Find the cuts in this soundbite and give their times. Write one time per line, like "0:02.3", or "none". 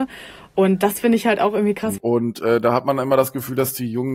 0:02.0

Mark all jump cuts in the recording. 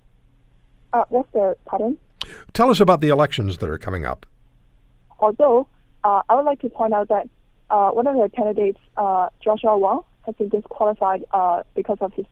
0:05.1

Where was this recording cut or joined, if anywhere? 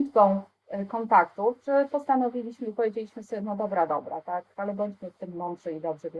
none

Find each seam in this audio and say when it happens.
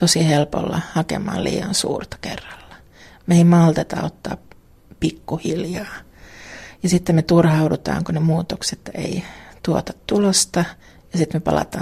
none

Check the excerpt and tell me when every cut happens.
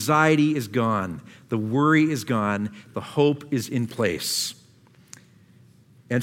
0:02.9

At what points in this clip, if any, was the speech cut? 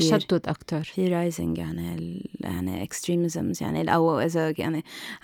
none

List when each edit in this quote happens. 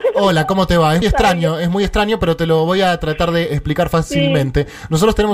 0:01.0

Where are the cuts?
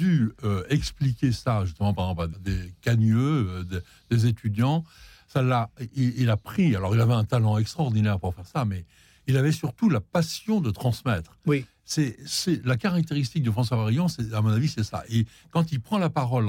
0:02.3

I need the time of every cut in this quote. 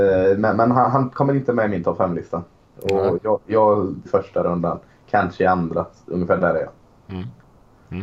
0:04.1

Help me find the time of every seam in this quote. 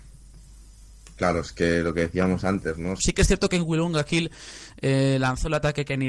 0:03.0

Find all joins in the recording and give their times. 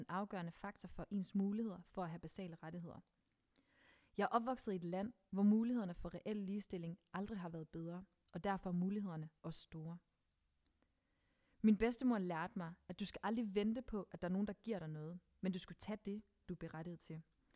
0:16.4

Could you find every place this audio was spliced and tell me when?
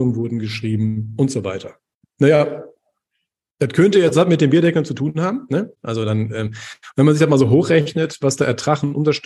0:05.7

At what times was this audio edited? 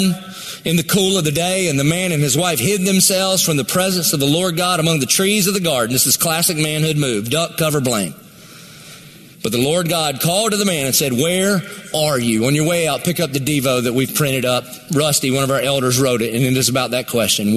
none

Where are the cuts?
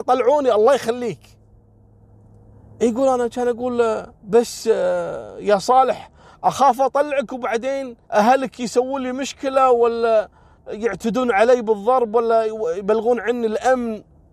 0:04.1
0:08.0

